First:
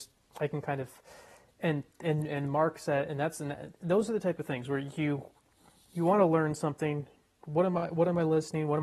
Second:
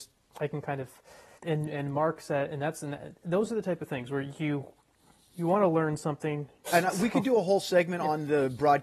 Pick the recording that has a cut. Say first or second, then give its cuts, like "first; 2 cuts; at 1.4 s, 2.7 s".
second; 2 cuts; at 1.4 s, 6.7 s